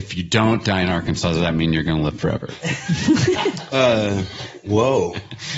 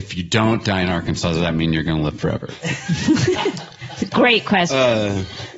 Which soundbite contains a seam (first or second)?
first